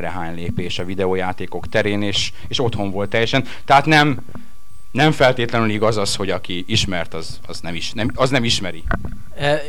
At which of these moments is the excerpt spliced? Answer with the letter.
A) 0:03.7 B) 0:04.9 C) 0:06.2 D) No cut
D